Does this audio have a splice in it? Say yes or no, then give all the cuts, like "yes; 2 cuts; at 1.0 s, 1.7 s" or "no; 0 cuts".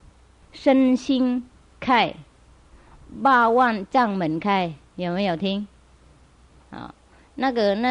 yes; 1 cut; at 6.6 s